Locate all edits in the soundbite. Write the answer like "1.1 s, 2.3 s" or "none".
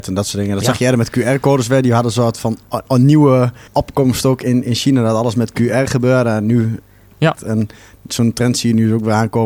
3.7 s, 7.3 s